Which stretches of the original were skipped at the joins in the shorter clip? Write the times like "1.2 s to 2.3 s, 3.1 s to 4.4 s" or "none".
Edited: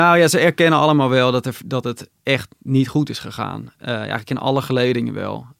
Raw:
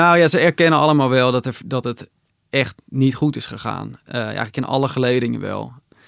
2.2 s to 2.4 s